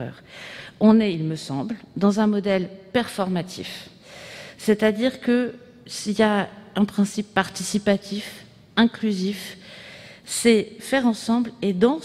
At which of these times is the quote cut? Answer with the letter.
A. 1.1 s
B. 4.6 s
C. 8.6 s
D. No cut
D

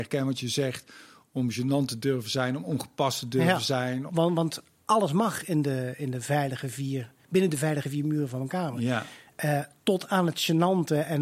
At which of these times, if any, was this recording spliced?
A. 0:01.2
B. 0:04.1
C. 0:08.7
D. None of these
B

